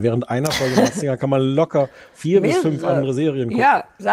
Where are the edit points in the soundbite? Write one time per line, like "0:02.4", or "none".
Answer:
none